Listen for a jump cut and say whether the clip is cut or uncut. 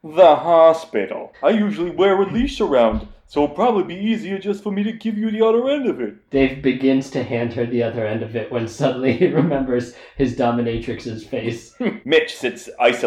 cut